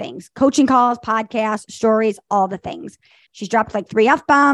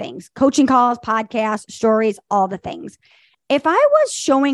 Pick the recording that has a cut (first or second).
first